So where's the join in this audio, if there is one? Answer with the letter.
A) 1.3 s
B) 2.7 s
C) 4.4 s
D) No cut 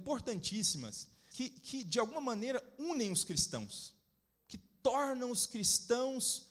A